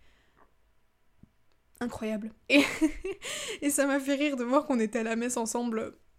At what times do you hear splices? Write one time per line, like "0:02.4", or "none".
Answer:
0:02.5

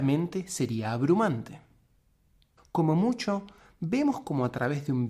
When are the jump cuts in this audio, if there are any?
0:02.6

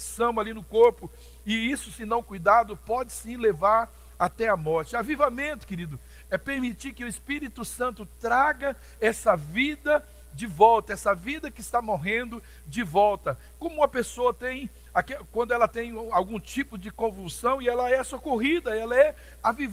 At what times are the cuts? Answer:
0:06.3

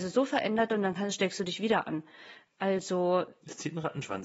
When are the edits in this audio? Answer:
none

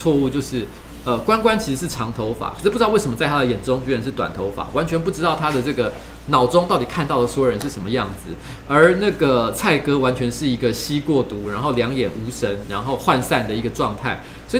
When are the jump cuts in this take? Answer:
none

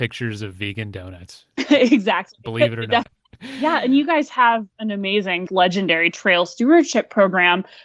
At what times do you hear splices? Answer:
0:03.0
0:05.5

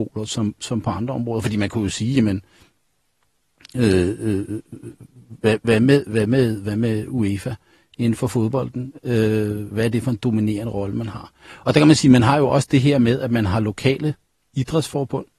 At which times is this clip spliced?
none

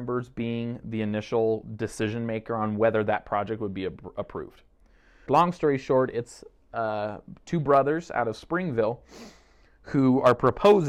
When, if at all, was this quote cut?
0:05.3

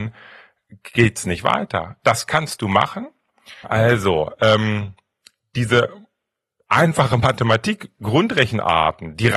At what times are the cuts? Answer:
0:02.0
0:03.6

